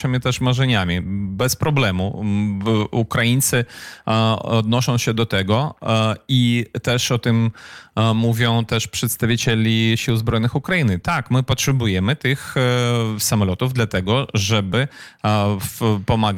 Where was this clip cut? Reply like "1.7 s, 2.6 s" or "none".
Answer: none